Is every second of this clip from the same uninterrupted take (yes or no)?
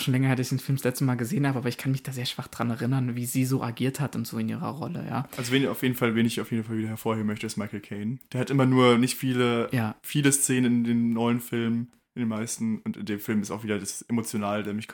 yes